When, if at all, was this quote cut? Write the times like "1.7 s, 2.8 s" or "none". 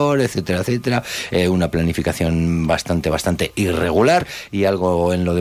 none

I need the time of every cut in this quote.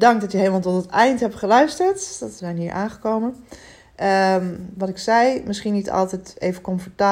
2.4 s

